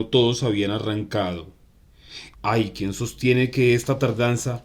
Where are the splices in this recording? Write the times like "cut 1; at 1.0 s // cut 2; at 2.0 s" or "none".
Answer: cut 1; at 2.3 s